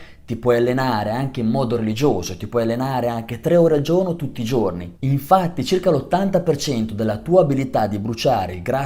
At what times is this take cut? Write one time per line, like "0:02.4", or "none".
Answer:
0:05.0